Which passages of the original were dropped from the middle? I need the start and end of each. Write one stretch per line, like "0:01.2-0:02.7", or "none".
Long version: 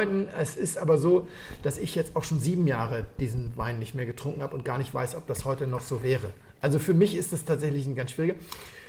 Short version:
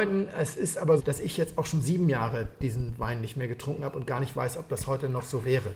0:01.0-0:01.6